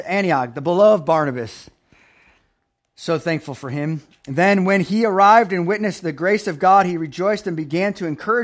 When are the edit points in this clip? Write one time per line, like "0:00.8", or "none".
none